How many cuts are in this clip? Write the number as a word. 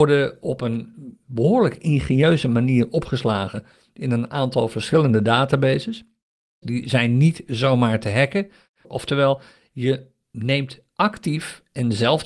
two